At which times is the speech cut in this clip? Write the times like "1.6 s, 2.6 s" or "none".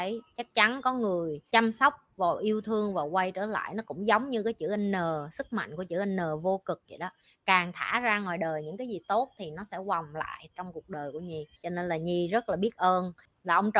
11.5 s